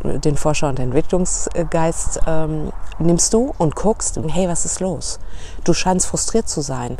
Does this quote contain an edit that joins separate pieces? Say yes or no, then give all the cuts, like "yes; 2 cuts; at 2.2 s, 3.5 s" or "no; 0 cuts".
yes; 2 cuts; at 2.9 s, 4.2 s